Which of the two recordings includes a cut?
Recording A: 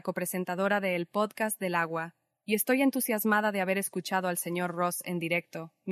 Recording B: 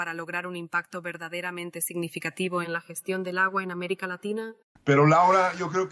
B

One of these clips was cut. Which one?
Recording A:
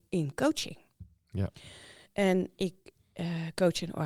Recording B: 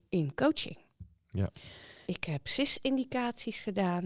B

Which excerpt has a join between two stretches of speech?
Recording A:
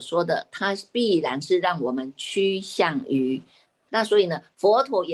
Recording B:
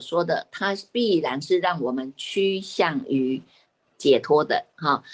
A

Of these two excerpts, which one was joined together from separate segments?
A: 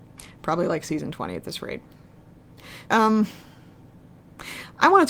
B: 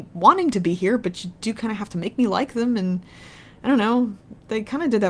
A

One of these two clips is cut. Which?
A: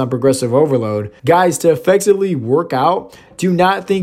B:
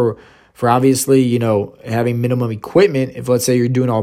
A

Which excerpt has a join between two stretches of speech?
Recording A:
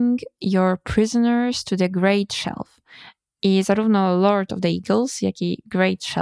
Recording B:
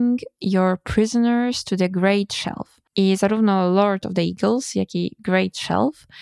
B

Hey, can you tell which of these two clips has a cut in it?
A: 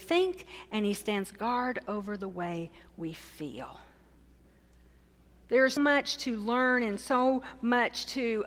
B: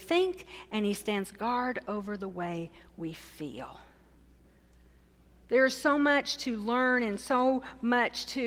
A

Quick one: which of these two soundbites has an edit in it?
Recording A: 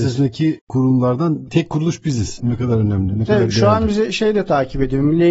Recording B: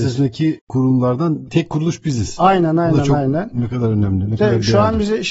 A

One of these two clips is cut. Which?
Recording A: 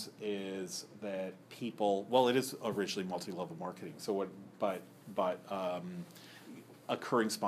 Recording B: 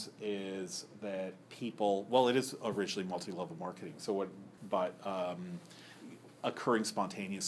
B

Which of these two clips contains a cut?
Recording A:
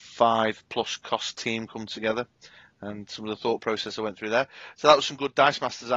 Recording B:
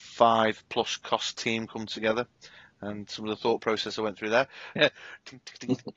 B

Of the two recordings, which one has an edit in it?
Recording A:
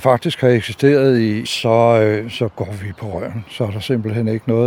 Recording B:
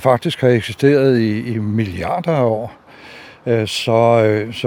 A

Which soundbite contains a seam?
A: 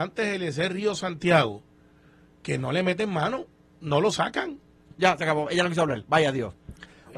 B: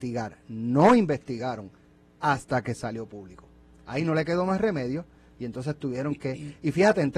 A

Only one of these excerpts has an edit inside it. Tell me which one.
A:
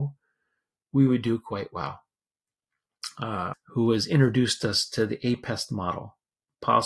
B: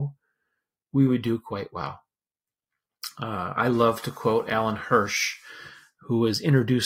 A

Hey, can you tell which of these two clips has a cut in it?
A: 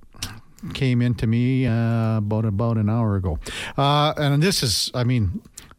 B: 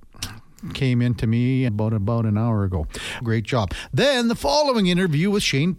B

